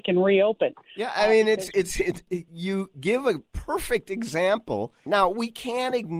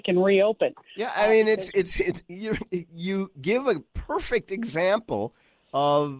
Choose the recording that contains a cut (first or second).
first